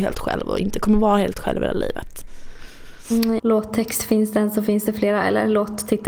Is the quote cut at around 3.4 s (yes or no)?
yes